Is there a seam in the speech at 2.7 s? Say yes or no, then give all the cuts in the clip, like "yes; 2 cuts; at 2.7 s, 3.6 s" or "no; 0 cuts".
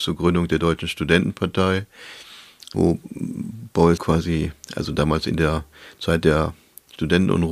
yes; 2 cuts; at 2.7 s, 4.0 s